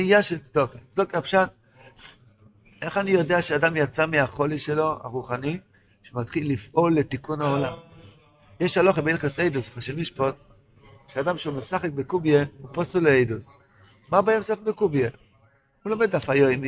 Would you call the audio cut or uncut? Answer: uncut